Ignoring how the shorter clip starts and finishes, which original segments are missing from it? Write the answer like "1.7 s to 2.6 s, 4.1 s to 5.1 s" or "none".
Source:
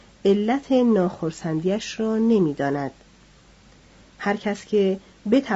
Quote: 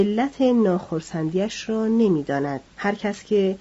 3.0 s to 4.1 s